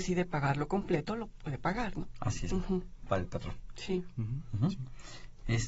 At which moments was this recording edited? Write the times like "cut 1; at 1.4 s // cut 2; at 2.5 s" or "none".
cut 1; at 2.5 s